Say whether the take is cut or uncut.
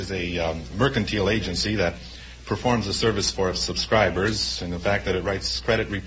uncut